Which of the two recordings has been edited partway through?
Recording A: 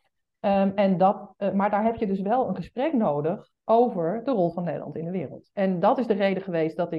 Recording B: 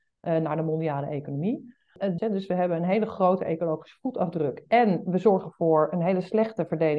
B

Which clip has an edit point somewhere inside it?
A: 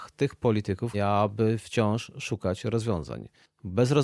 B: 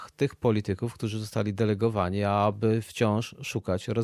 A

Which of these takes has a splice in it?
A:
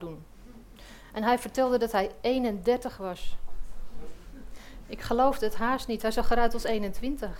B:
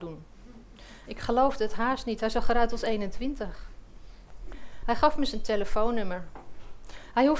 B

